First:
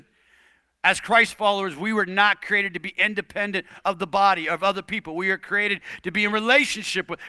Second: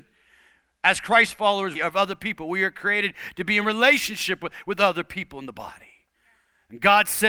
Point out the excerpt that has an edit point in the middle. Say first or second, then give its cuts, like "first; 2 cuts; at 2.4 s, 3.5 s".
second; 1 cut; at 1.7 s